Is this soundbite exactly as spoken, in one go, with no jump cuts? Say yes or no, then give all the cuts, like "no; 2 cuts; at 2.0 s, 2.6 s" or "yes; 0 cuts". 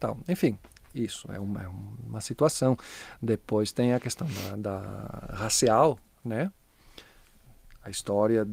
yes; 0 cuts